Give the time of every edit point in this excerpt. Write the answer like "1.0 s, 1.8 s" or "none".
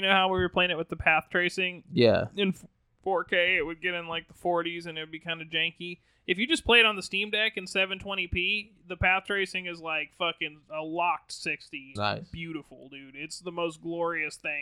12.0 s